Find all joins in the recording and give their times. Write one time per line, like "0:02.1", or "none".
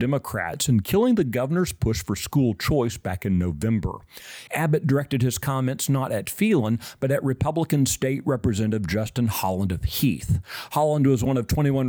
0:04.5